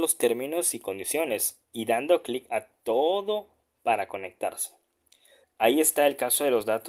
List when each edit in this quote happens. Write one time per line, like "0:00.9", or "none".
0:05.4

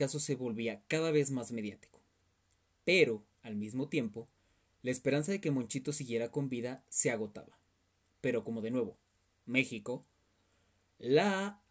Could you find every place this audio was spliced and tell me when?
none

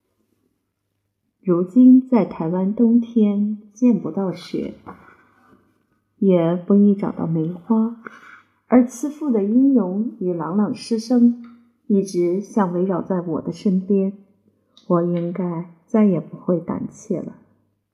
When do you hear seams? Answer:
none

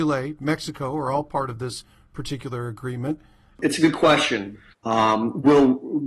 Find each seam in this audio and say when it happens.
0:03.6
0:04.7

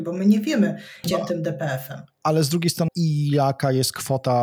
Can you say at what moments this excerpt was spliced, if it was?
0:01.0
0:02.9

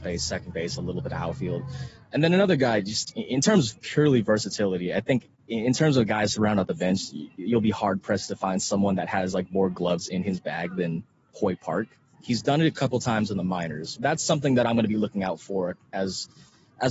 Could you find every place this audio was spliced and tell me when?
0:12.1
0:14.0

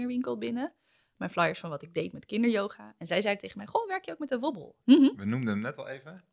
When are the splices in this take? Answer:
0:04.8

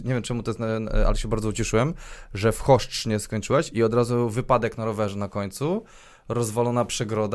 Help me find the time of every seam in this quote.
none

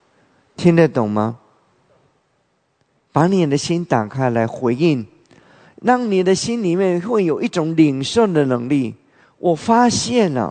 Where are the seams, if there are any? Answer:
none

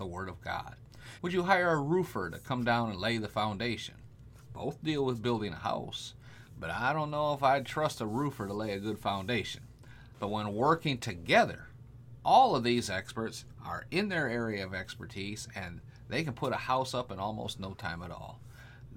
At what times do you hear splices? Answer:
0:01.2
0:10.1

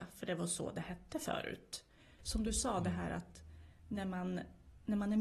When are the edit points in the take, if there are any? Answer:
0:02.2

